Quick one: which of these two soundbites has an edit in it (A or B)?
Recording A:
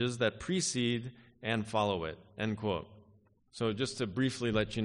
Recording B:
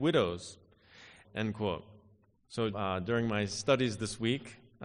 B